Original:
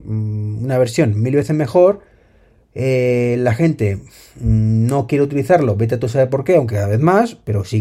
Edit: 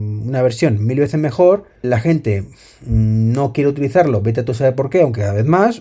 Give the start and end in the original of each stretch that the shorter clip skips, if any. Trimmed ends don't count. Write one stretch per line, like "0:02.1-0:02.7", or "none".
0:02.2-0:03.4